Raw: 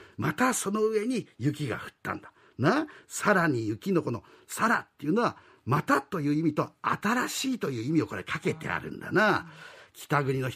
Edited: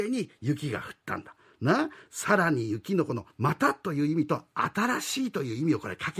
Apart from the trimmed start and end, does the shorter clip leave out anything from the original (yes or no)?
yes